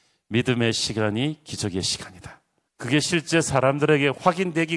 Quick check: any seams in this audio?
yes; 1 cut; at 2.7 s

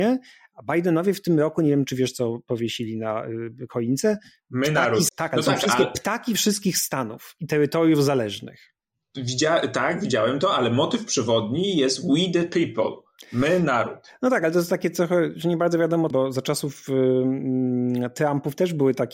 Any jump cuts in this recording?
yes; 2 cuts; at 5.1 s, 16.1 s

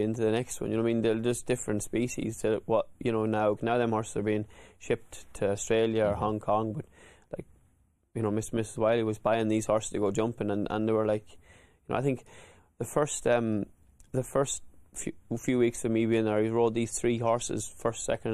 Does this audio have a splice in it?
yes; 1 cut; at 3.6 s

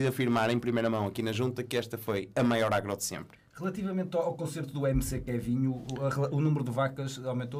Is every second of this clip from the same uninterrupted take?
yes; 0 cuts

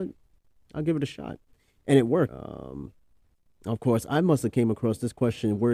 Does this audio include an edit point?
yes; 1 cut; at 2.3 s

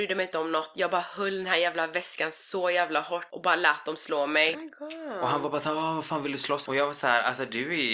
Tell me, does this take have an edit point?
yes; 2 cuts; at 4.5 s, 6.7 s

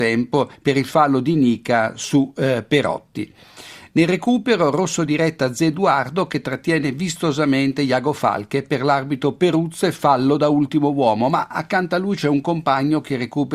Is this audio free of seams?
yes; 0 cuts

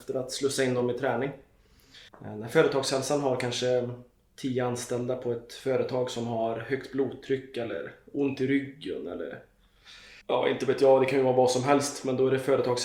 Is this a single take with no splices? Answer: no; 2 cuts; at 2.1 s, 10.2 s

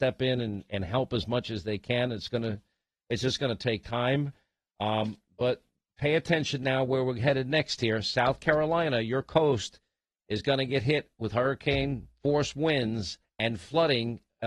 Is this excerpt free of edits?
yes; 0 cuts

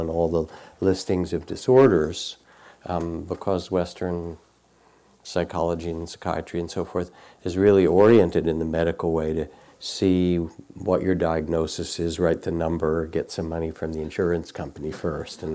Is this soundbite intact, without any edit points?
yes; 0 cuts

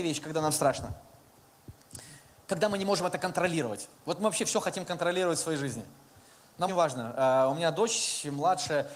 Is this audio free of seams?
no; 2 cuts; at 4.0 s, 6.7 s

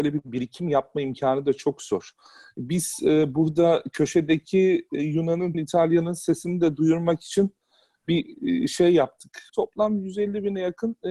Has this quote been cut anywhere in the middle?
yes; 2 cuts; at 5.5 s, 9.5 s

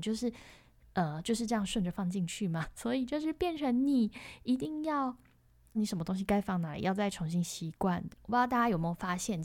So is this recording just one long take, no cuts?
no; 2 cuts; at 5.7 s, 8.1 s

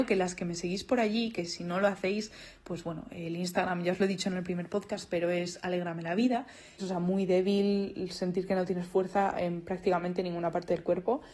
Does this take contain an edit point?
yes; 1 cut; at 6.8 s

